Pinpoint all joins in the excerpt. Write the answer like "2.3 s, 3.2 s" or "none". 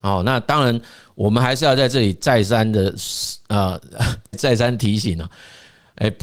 4.3 s